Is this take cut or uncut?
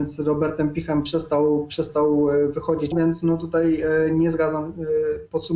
cut